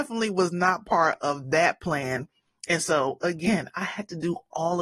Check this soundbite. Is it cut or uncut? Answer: uncut